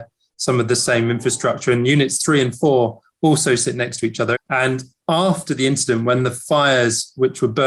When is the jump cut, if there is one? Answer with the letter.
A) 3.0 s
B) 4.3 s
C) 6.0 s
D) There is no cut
B